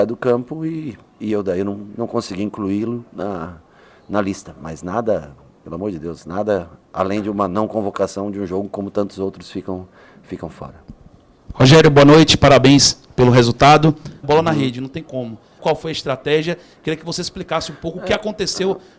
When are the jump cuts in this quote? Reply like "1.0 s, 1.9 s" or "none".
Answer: 14.2 s, 15.6 s

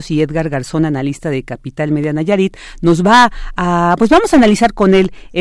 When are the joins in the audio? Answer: none

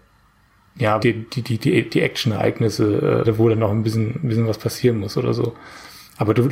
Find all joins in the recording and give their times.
1.0 s, 3.2 s

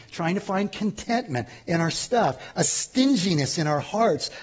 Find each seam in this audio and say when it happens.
none

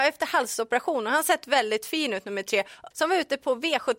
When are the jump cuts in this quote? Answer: 2.9 s

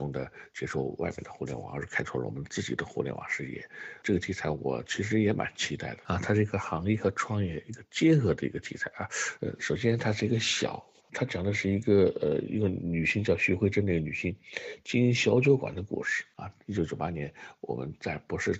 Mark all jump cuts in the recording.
9.4 s, 11.0 s, 16.3 s

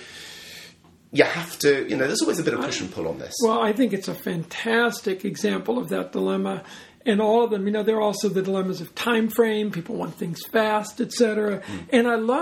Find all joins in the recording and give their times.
none

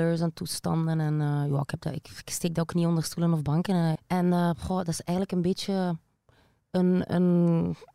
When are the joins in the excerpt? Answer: 4.0 s

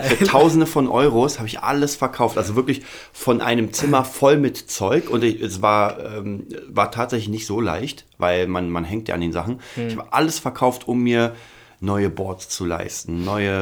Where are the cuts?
none

